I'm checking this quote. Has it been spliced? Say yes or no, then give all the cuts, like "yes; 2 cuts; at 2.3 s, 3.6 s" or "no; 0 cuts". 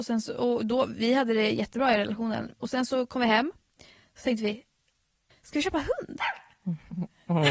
no; 0 cuts